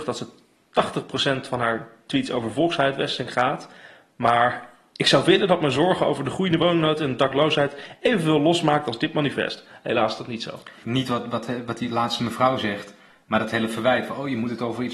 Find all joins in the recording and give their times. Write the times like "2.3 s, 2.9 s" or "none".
10.8 s